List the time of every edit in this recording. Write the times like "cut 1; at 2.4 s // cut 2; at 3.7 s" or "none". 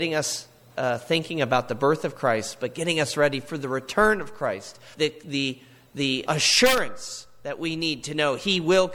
cut 1; at 4.9 s // cut 2; at 6.3 s